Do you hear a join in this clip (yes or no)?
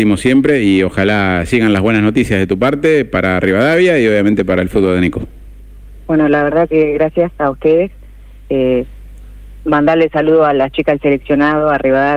no